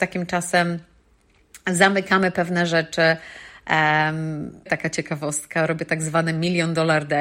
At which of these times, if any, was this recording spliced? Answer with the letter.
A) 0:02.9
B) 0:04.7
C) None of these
B